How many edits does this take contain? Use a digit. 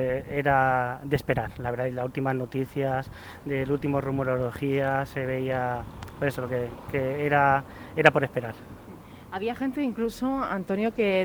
0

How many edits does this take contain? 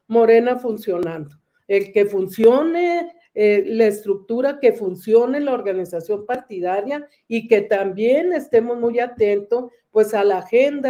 1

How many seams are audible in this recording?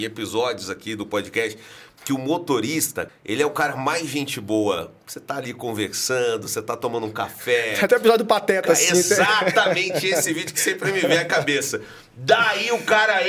1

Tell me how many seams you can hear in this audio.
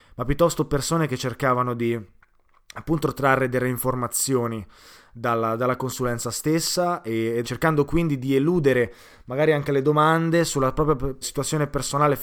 2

